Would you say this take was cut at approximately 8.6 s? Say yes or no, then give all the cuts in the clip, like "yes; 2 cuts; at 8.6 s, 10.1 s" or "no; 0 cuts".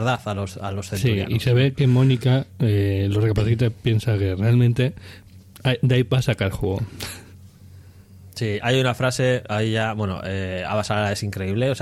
yes; 1 cut; at 8.6 s